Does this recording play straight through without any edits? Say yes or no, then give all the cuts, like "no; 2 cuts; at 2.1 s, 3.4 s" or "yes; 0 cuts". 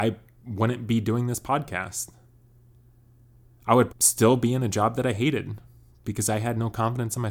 no; 1 cut; at 3.9 s